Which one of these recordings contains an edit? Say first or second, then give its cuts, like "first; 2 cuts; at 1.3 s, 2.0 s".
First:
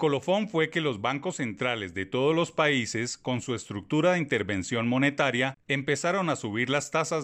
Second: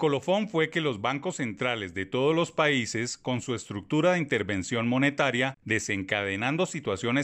second; 1 cut; at 5.6 s